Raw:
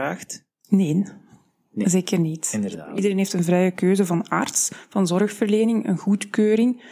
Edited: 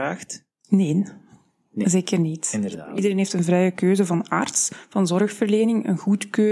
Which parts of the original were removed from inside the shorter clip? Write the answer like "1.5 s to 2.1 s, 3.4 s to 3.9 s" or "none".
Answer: none